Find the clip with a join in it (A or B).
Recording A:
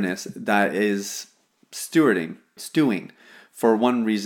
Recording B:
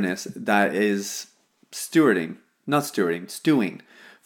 A